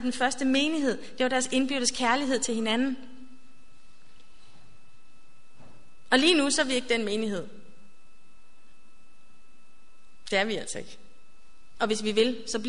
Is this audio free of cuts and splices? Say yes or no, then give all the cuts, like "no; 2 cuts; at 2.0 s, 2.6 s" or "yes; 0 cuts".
no; 1 cut; at 11.7 s